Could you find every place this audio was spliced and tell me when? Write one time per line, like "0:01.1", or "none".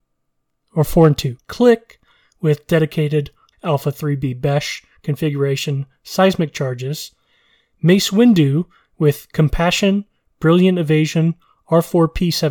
0:01.4
0:03.5